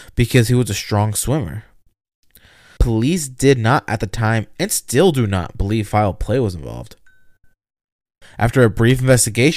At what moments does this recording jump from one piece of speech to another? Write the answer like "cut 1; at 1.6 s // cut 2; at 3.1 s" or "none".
cut 1; at 2.8 s // cut 2; at 8.2 s